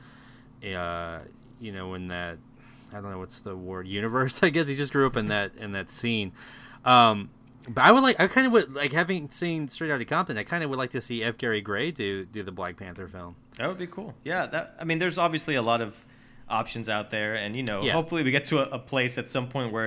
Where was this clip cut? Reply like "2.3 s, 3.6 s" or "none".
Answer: none